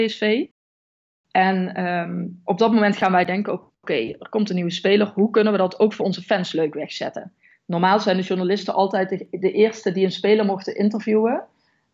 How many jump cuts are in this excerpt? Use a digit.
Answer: 0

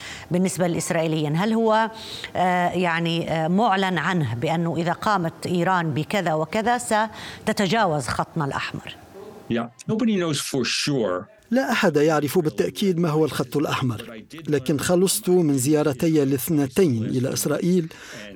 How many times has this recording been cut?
1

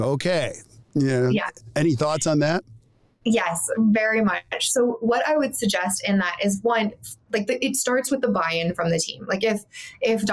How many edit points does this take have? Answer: 0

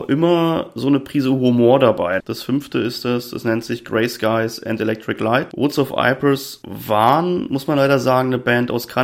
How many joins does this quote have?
1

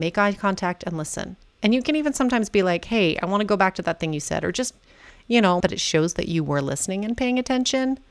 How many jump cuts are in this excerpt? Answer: 1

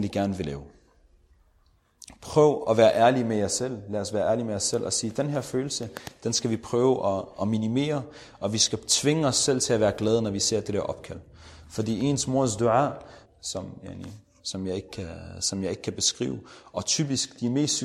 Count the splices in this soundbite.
1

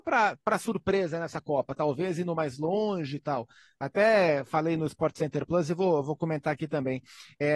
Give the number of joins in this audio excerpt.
0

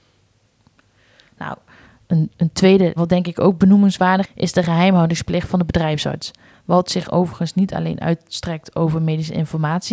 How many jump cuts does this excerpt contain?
3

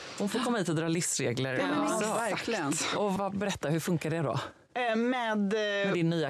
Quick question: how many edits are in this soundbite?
1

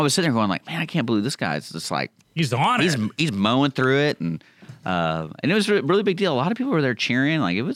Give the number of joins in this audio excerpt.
0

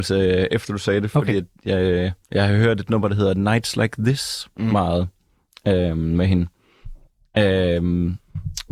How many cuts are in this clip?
1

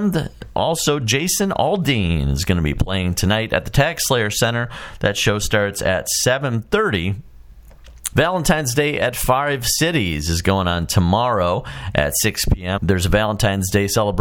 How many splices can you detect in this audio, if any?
2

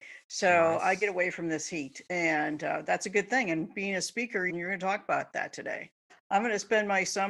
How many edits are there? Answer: 2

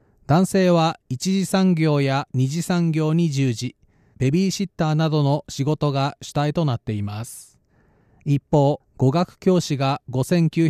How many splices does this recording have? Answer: 2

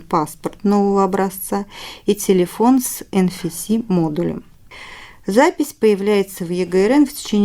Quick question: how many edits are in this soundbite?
0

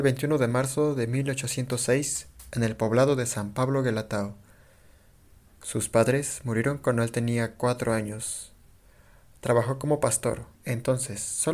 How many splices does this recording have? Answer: 1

